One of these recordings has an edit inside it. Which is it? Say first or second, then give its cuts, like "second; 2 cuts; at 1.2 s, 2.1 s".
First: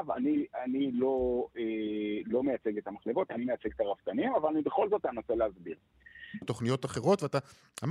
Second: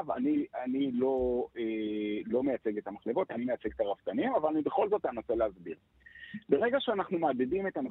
first; 1 cut; at 6.4 s